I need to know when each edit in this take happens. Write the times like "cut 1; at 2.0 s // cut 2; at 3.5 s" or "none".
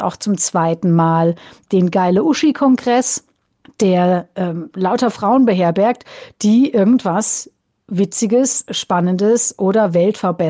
none